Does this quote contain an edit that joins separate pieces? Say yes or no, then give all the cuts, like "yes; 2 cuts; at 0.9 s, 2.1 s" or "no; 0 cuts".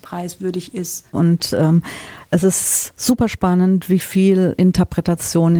yes; 1 cut; at 1.1 s